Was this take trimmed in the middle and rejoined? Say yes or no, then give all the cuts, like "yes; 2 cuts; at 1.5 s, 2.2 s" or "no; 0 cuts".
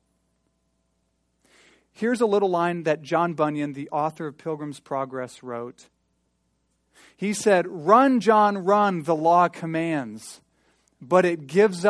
no; 0 cuts